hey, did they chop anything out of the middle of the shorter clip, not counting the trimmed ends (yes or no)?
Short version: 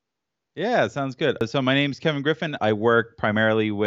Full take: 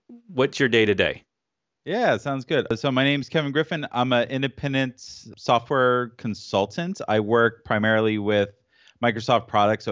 yes